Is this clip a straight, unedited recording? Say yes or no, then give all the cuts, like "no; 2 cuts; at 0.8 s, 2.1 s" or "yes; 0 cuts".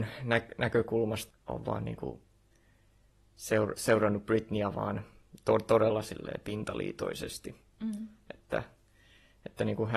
no; 1 cut; at 1.3 s